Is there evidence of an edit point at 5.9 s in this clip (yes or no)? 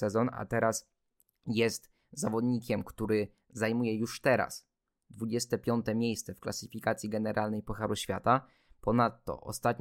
no